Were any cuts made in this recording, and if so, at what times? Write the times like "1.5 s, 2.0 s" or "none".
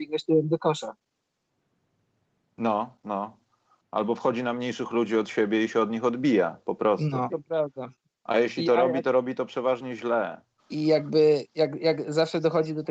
7.3 s, 10.6 s